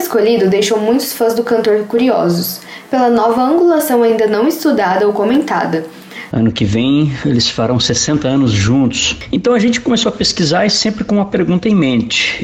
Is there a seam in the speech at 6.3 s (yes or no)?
yes